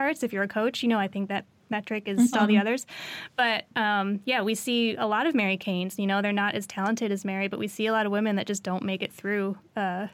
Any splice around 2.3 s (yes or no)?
yes